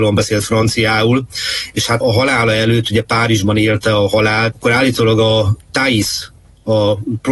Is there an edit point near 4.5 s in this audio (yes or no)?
yes